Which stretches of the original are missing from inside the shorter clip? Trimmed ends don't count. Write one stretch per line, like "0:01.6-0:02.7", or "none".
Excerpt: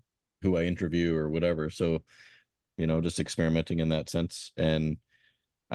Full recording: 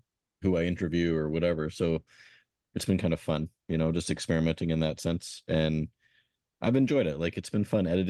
0:02.7-0:03.6